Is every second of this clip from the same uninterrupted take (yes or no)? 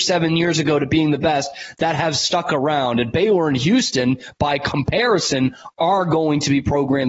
yes